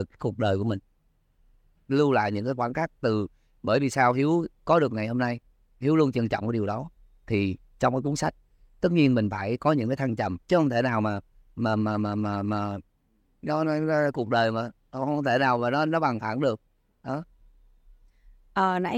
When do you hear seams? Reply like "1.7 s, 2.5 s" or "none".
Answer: 10.4 s